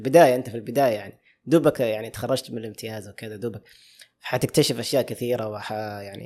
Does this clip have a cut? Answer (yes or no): no